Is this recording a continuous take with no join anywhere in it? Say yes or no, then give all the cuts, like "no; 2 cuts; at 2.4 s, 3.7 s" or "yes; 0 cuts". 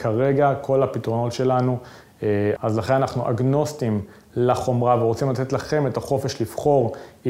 no; 1 cut; at 2.6 s